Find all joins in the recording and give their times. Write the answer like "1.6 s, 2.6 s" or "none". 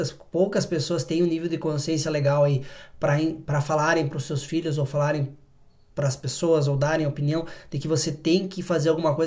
none